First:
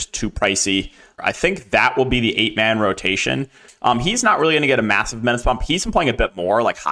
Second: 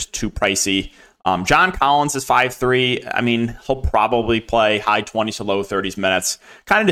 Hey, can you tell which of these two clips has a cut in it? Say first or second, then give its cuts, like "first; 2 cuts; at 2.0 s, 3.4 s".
first; 2 cuts; at 1.2 s, 3.7 s